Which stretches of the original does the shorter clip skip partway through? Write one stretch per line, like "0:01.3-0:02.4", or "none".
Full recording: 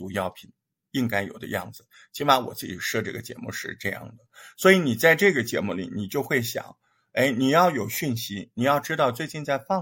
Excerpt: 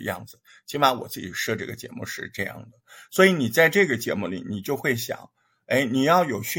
none